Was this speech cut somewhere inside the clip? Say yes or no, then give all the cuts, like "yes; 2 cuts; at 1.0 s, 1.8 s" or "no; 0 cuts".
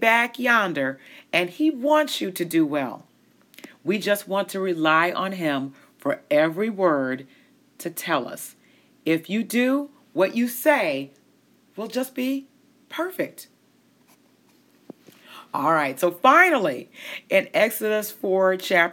no; 0 cuts